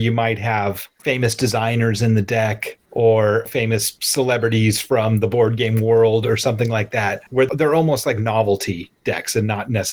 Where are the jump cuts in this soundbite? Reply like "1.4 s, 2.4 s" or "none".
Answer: 2.9 s